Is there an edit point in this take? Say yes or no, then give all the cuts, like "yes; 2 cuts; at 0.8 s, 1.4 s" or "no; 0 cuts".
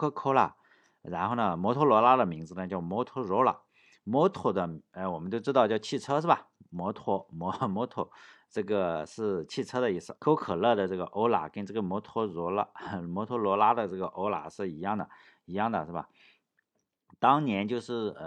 yes; 1 cut; at 10.2 s